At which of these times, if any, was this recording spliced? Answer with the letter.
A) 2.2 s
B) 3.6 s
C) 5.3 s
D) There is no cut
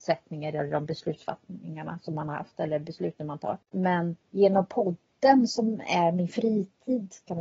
B